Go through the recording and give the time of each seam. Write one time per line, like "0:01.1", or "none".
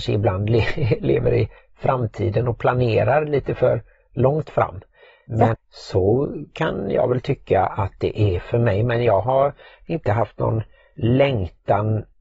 0:05.5